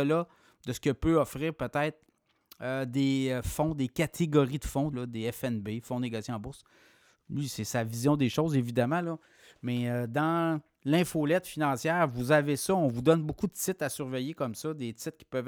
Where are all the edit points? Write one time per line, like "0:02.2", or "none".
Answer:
0:04.9